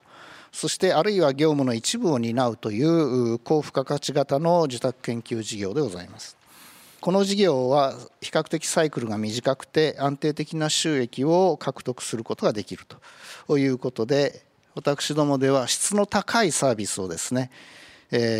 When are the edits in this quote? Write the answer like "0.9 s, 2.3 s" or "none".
none